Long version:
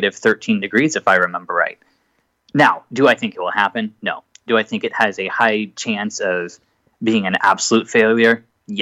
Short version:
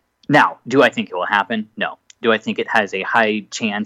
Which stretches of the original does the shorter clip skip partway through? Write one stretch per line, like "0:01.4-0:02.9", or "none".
none